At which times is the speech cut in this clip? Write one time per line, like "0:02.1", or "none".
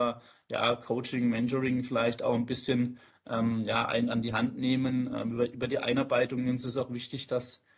none